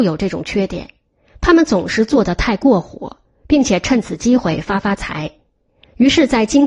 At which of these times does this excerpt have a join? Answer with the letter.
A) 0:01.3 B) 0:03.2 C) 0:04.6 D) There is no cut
D